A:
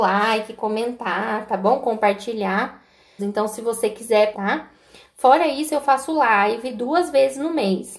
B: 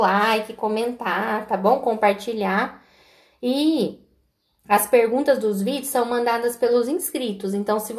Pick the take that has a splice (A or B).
A